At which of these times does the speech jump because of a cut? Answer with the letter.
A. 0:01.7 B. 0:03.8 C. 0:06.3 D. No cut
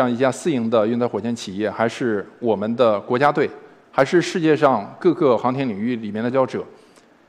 C